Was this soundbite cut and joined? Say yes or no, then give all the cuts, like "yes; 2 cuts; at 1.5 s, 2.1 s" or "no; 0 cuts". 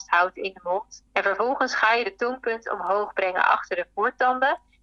yes; 1 cut; at 1.1 s